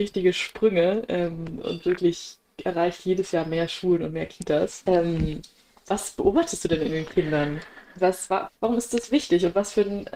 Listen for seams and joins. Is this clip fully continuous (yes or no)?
no